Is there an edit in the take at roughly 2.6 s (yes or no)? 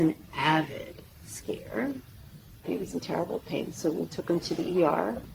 yes